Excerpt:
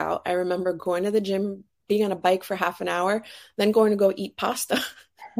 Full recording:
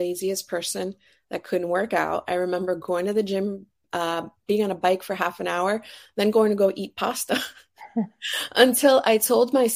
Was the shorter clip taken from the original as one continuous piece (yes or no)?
no